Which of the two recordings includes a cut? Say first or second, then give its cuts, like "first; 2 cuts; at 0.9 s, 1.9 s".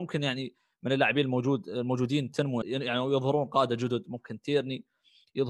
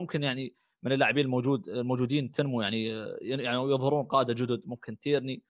first; 1 cut; at 2.6 s